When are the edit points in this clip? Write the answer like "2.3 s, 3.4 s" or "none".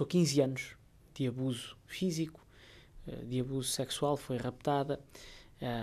none